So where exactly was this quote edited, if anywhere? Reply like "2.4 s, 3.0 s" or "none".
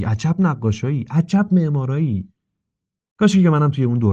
none